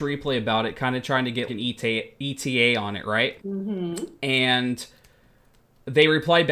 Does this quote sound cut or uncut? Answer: cut